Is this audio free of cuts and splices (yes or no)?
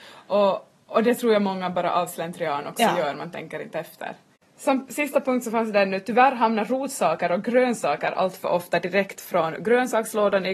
yes